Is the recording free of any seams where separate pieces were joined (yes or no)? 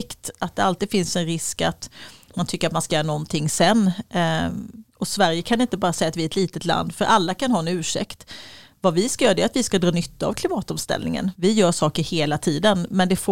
no